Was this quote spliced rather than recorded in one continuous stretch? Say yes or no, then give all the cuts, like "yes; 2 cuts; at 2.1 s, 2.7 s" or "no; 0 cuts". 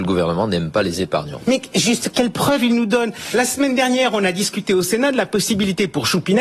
no; 0 cuts